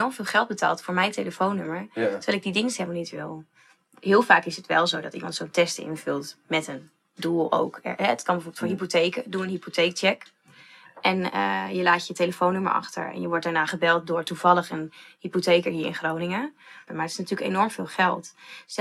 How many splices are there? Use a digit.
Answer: 1